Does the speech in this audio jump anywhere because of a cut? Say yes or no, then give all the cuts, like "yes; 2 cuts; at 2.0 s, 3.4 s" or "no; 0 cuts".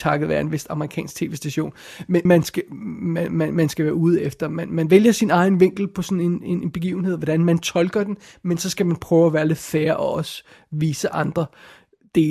yes; 1 cut; at 2.3 s